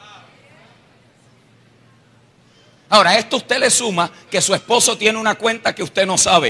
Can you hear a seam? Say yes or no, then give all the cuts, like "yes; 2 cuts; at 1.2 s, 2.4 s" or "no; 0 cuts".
no; 0 cuts